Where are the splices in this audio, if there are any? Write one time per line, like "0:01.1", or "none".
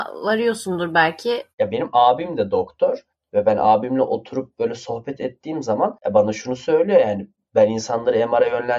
0:01.5
0:06.0